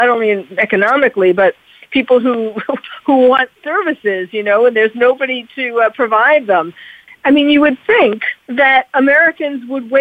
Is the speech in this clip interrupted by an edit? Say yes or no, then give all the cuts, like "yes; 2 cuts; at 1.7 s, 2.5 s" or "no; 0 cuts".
yes; 2 cuts; at 7.1 s, 8.4 s